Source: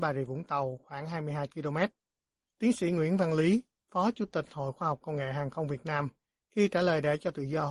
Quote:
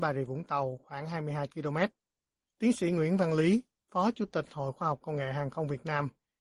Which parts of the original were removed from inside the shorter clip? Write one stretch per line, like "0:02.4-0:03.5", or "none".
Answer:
none